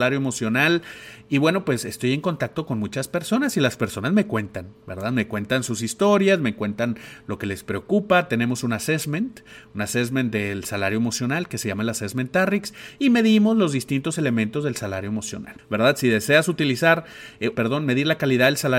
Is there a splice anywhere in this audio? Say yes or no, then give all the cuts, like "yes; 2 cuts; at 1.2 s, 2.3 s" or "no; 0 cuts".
yes; 2 cuts; at 15.6 s, 17.6 s